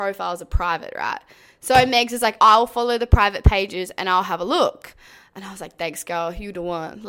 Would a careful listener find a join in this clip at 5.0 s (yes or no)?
no